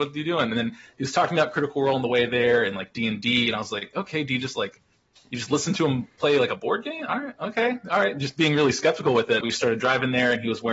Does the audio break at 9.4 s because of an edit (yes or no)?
yes